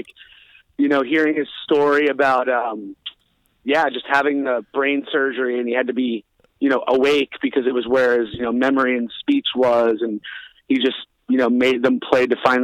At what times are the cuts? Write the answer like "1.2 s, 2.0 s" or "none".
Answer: none